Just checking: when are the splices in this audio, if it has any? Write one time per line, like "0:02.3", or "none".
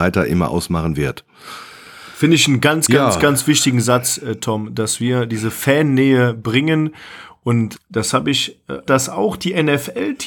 0:07.7
0:08.9